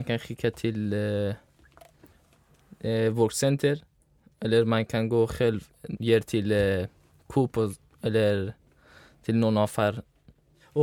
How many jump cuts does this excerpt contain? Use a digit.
1